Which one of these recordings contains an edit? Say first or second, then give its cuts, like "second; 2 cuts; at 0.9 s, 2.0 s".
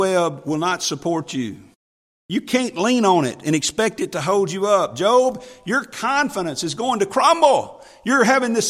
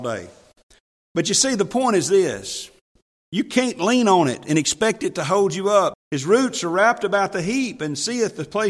second; 2 cuts; at 3.1 s, 5.9 s